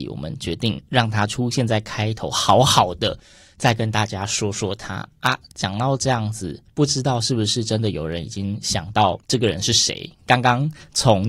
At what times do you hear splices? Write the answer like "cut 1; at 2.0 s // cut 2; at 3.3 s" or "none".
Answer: none